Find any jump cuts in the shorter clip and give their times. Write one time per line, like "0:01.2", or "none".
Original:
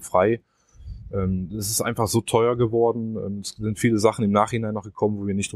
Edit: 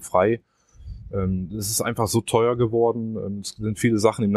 none